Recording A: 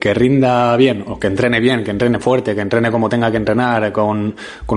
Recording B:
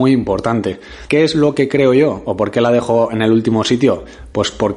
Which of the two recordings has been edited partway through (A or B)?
B